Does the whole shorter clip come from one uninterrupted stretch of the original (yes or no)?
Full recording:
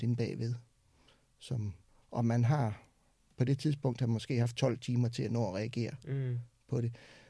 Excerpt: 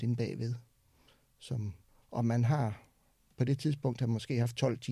yes